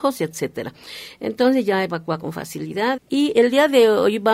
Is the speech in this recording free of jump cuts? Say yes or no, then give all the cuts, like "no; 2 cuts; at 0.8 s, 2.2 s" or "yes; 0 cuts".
no; 1 cut; at 3.0 s